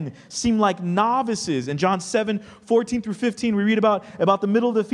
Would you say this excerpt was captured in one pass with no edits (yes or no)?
yes